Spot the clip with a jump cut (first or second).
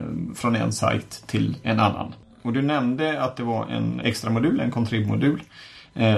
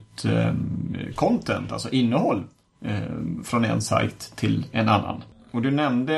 first